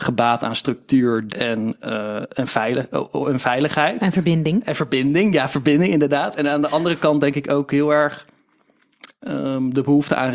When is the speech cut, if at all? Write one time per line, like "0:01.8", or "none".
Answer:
0:01.3